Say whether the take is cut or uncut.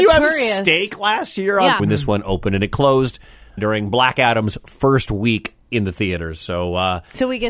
cut